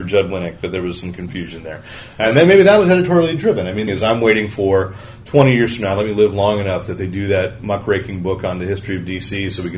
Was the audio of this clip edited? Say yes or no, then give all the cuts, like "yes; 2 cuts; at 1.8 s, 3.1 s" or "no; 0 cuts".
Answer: yes; 1 cut; at 3.9 s